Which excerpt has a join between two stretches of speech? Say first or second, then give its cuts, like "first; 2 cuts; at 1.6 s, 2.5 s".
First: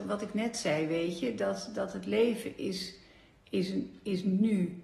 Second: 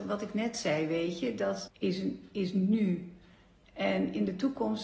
second; 1 cut; at 1.7 s